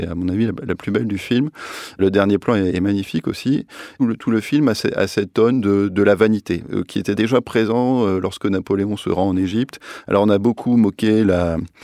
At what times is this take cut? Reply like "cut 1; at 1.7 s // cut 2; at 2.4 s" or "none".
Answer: cut 1; at 2.7 s // cut 2; at 4.0 s